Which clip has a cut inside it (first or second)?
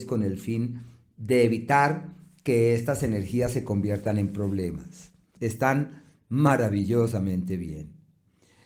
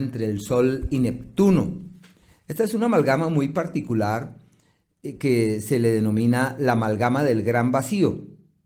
first